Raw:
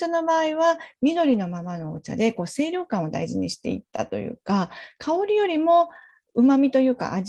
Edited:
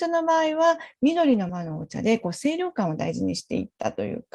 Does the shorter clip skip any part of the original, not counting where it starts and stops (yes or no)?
yes